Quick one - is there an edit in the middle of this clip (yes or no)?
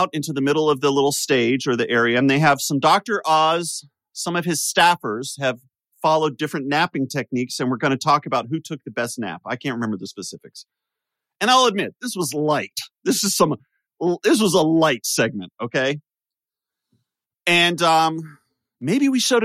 no